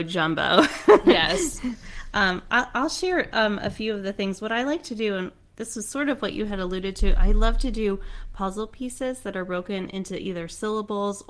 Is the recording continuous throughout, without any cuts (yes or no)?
yes